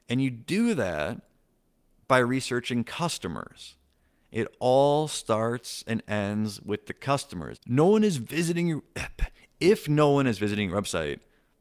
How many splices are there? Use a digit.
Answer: 1